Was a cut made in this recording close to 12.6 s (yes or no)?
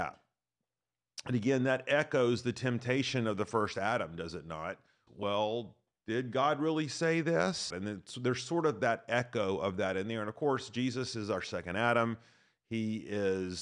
no